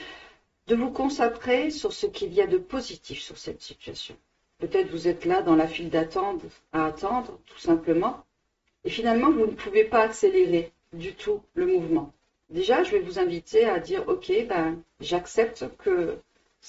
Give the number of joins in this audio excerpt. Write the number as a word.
zero